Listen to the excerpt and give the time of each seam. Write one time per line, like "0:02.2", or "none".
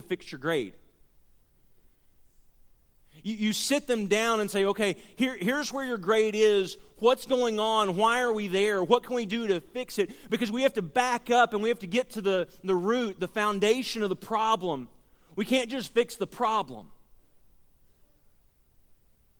none